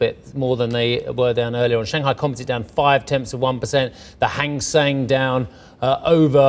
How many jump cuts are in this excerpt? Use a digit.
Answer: 0